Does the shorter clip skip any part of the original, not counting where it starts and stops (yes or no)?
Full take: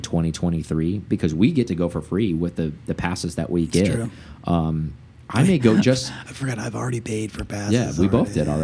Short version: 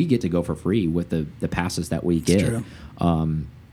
no